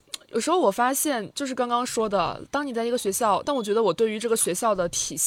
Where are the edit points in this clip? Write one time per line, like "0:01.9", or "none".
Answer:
0:03.4

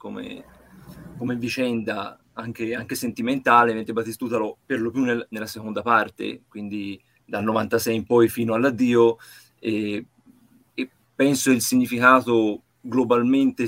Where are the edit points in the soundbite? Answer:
0:04.5

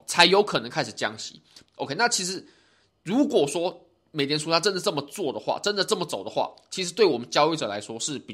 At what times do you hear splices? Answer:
0:01.7

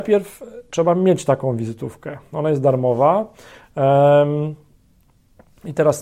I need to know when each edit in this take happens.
none

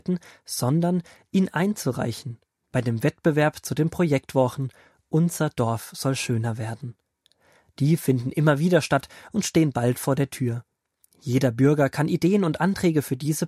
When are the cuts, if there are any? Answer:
none

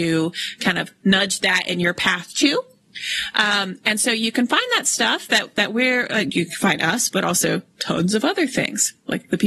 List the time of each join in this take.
none

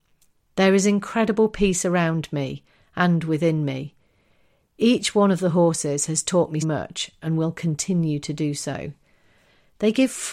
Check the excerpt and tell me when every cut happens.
0:06.6

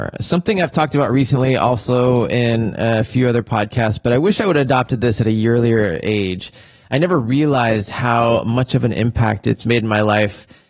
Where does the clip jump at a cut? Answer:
none

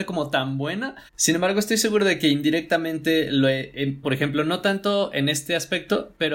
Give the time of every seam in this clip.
0:01.1
0:04.0

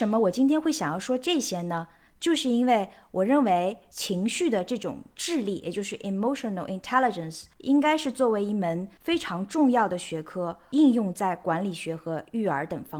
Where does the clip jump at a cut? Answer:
none

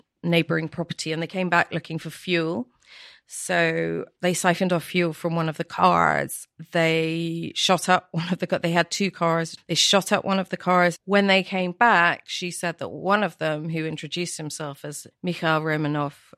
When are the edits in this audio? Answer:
0:11.0

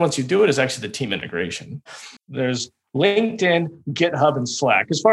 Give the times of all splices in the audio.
0:02.2

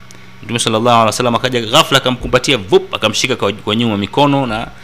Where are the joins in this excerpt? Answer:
none

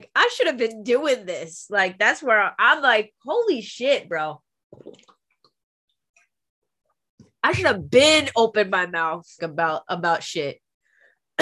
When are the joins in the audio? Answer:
0:09.4

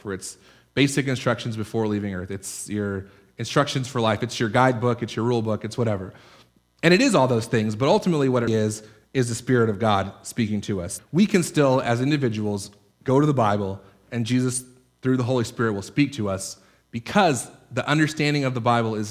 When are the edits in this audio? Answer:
0:08.5
0:11.0

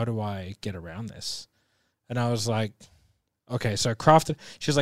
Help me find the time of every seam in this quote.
none

